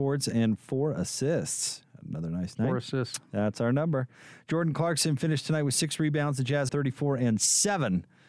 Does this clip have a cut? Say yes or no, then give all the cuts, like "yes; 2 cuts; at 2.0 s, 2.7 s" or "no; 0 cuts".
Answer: yes; 1 cut; at 6.7 s